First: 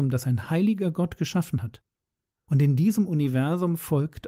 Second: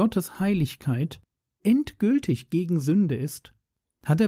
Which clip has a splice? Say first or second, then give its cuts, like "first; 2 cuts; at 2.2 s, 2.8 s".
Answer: second; 1 cut; at 1.6 s